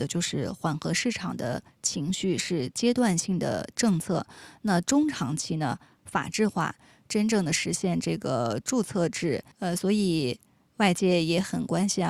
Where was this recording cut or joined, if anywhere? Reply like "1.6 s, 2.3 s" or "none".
6.0 s, 9.5 s

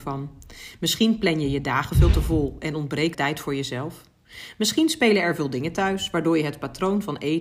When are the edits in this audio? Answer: 3.1 s

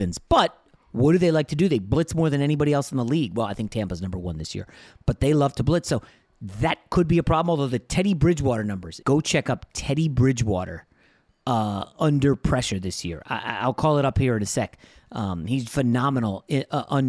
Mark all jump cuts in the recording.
9.0 s, 15.6 s

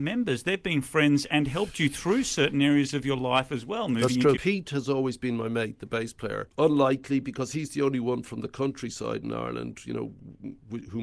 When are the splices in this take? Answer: 4.4 s

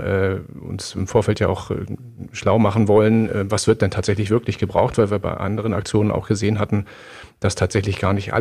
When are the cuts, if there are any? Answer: none

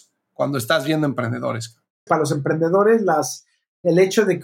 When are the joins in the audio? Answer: 2.1 s

